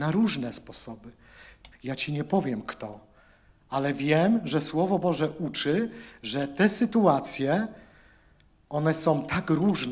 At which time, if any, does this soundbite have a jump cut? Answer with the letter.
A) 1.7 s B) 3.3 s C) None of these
A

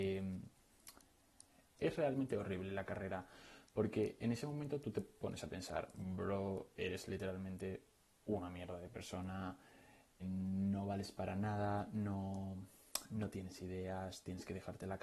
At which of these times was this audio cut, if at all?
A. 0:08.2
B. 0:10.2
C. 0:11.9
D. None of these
B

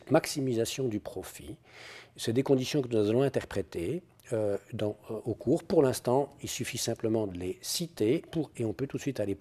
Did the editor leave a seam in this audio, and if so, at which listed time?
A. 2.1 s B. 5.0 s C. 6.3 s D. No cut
D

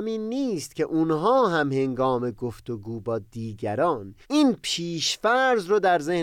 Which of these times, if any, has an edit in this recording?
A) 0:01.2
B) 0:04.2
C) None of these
B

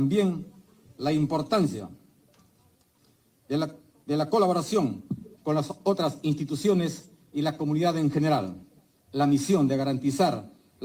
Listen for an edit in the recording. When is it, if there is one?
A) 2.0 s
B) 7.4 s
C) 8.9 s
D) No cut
C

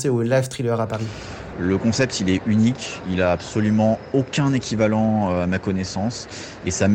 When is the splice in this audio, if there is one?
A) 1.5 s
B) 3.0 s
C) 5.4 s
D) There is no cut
A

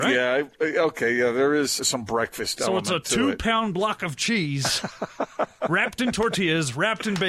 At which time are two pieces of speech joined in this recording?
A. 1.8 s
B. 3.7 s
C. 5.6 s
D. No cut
A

